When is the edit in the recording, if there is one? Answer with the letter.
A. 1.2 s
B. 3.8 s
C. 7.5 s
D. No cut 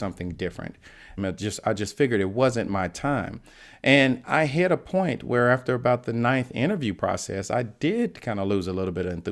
A